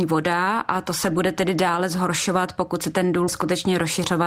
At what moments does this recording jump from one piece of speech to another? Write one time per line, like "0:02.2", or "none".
0:03.3